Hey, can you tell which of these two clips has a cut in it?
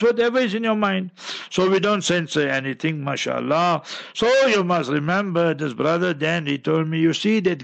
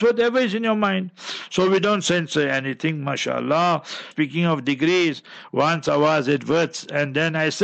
second; 1 cut; at 4.1 s

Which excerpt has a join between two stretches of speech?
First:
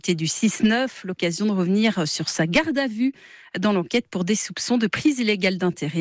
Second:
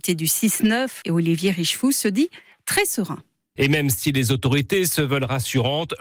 second; 2 cuts; at 1.0 s, 3.6 s

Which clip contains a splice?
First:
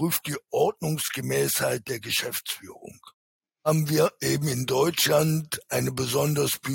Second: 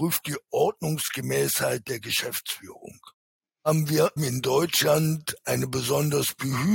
second; 1 cut; at 4.2 s

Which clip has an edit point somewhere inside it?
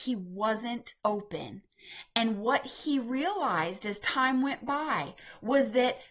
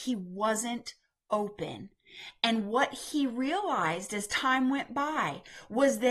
first; 1 cut; at 1.0 s

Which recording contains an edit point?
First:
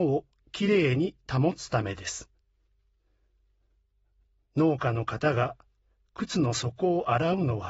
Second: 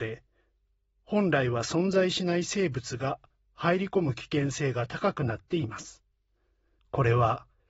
second; 1 cut; at 6.8 s

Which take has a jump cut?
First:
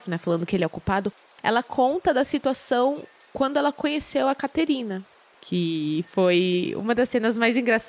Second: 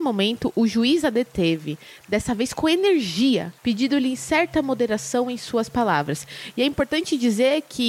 second; 1 cut; at 3.6 s

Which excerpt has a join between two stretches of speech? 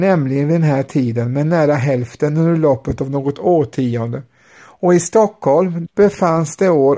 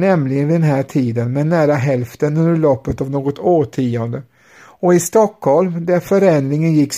first; 1 cut; at 5.9 s

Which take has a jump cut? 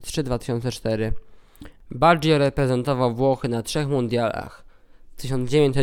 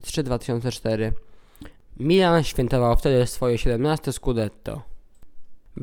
first; 1 cut; at 1.8 s

